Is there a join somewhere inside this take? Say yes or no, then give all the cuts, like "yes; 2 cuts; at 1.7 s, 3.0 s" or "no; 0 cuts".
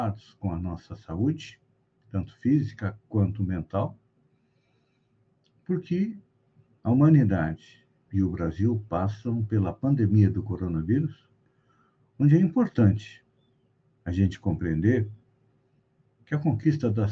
yes; 1 cut; at 8.0 s